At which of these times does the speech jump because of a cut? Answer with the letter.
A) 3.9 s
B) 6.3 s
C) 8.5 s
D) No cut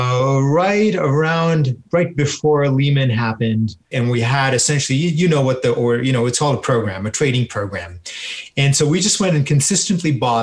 A